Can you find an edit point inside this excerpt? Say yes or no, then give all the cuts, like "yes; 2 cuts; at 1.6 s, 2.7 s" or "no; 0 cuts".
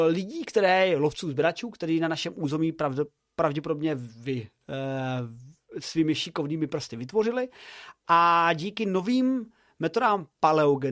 no; 0 cuts